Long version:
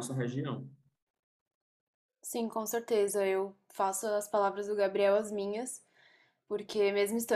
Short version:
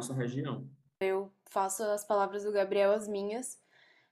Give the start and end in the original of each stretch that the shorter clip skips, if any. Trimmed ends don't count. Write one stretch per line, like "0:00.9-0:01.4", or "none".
0:01.0-0:03.2